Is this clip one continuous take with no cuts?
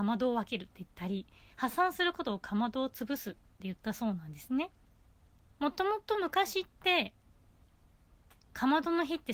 no; 1 cut; at 5.5 s

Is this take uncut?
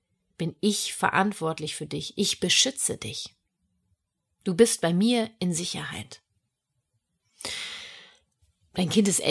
yes; 0 cuts

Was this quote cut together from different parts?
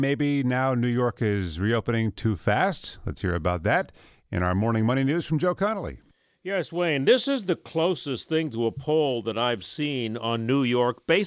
no; 0 cuts

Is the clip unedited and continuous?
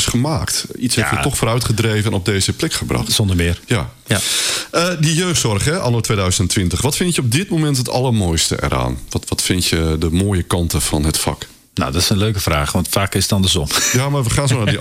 yes; 0 cuts

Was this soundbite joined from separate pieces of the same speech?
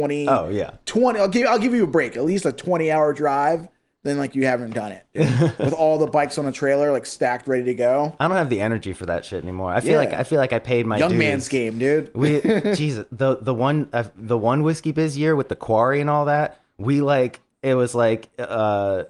no; 0 cuts

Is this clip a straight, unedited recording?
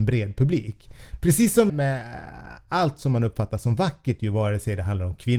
no; 1 cut; at 1.7 s

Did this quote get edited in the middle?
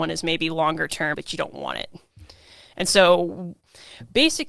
yes; 1 cut; at 1.1 s

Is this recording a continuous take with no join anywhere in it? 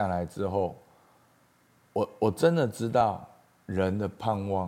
yes; 0 cuts

